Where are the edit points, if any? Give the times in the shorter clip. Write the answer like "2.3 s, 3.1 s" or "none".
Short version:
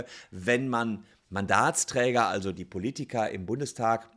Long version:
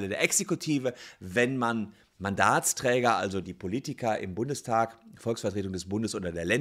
none